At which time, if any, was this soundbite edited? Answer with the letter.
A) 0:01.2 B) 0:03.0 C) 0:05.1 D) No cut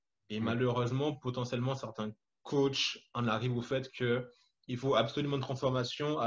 D